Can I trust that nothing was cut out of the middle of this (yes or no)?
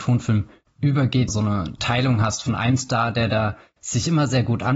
no